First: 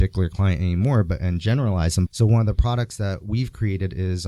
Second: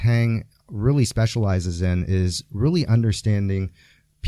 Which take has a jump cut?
first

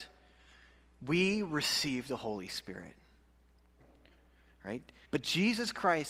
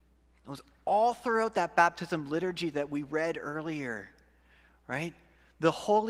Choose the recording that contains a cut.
first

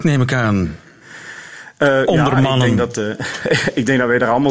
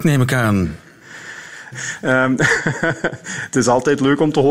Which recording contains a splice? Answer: second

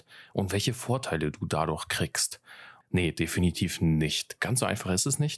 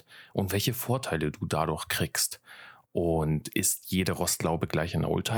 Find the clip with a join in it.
first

